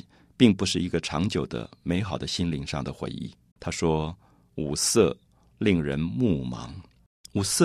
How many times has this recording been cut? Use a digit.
1